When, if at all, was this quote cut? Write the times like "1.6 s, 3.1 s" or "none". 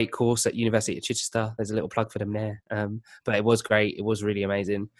none